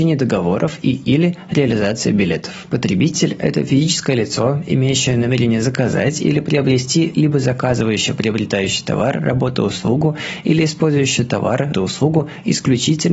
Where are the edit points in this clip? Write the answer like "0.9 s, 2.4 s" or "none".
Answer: 2.7 s, 11.7 s